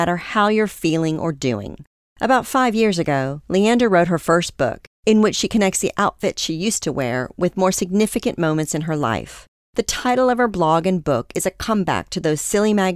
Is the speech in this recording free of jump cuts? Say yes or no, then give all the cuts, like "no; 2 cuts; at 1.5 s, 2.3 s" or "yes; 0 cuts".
yes; 0 cuts